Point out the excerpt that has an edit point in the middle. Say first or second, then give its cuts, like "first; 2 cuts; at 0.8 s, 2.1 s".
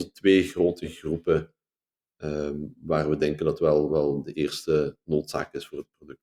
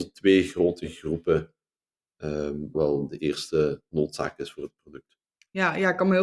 second; 1 cut; at 2.7 s